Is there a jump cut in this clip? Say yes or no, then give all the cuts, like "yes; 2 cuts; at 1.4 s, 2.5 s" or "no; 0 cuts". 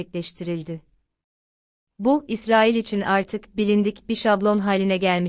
yes; 1 cut; at 1.8 s